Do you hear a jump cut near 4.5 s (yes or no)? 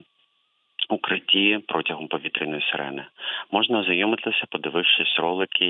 yes